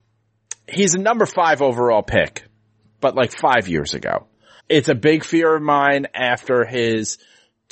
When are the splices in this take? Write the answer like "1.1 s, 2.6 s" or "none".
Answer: 4.6 s